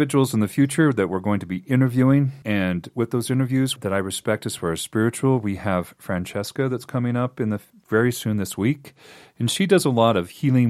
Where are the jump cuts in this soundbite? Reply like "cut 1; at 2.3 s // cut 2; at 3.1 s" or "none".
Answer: cut 1; at 2.4 s // cut 2; at 3.8 s // cut 3; at 7.7 s